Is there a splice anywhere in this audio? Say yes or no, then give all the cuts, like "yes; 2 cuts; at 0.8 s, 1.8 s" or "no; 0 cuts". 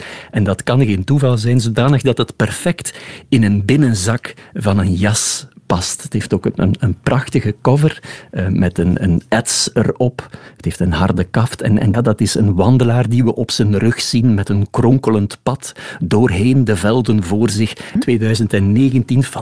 yes; 2 cuts; at 11.9 s, 18.0 s